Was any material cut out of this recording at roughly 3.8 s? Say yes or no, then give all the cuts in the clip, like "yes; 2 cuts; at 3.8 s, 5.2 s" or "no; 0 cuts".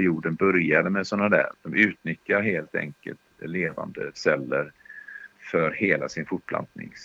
no; 2 cuts; at 1.5 s, 5.3 s